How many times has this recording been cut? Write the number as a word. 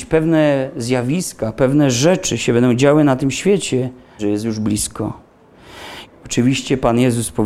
two